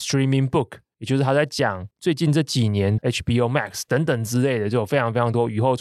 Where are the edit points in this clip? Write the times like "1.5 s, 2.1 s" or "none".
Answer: 3.0 s